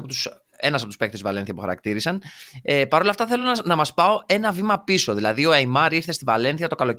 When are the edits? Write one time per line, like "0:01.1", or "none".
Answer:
none